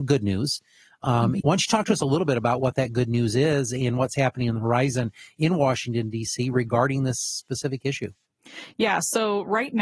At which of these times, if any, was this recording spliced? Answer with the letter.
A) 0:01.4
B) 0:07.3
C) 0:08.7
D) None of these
A